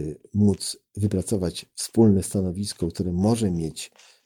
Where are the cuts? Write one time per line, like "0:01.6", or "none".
none